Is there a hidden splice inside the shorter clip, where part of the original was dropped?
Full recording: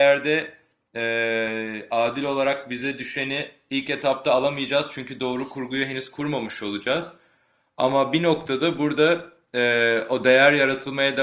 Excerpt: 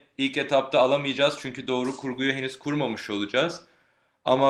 no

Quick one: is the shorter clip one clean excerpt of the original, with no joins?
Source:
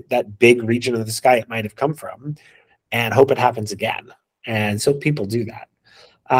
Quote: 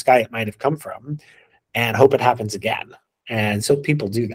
yes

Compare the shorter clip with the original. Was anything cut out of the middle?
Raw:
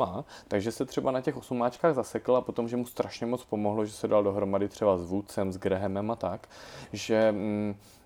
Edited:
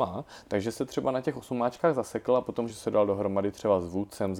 yes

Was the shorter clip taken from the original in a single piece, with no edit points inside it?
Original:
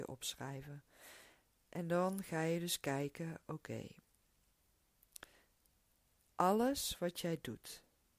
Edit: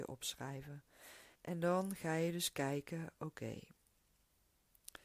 no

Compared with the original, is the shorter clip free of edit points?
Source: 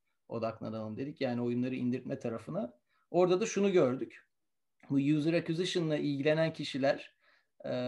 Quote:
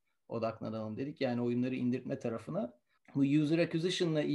no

